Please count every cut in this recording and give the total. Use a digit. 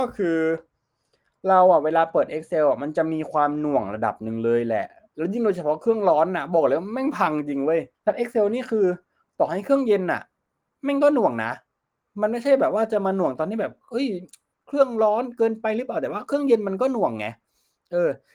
1